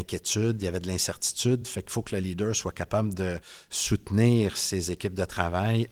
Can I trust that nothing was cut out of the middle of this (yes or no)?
yes